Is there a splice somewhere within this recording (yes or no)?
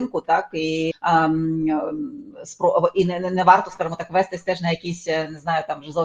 yes